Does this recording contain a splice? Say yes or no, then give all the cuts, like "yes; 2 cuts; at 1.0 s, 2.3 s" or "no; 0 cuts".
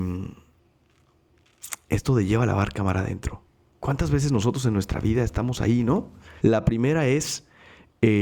yes; 2 cuts; at 3.7 s, 6.4 s